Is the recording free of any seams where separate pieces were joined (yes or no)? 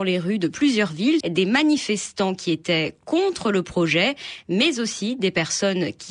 no